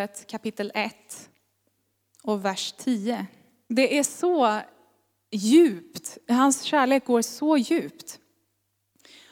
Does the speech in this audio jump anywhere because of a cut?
yes; 1 cut; at 3.7 s

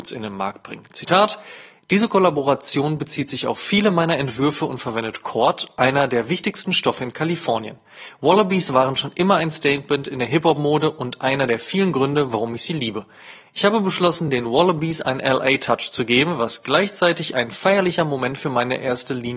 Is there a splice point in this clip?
no; 0 cuts

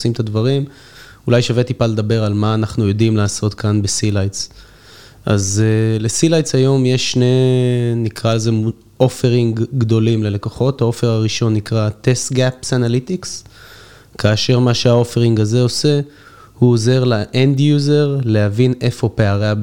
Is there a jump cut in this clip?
no; 0 cuts

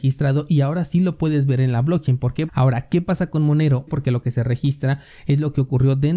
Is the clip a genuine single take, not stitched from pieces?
no; 2 cuts; at 2.5 s, 3.9 s

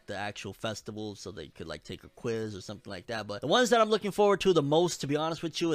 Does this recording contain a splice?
no; 0 cuts

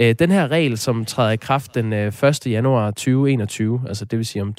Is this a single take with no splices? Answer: yes; 0 cuts

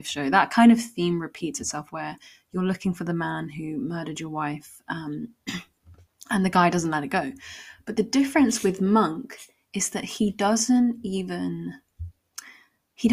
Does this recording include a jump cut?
no; 0 cuts

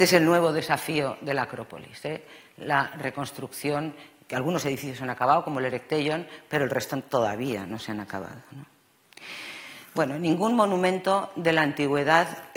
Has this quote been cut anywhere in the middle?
no; 0 cuts

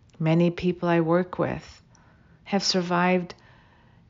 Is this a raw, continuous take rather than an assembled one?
yes; 0 cuts

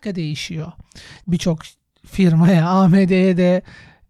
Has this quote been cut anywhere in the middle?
yes; 1 cut; at 1.2 s

